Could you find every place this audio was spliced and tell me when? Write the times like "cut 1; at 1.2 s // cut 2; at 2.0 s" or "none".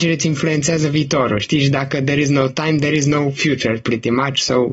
none